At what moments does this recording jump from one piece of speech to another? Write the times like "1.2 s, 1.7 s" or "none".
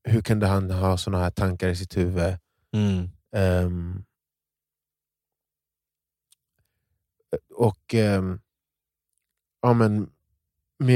none